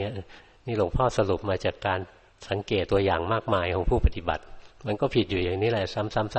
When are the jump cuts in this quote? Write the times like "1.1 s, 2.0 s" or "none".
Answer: 2.9 s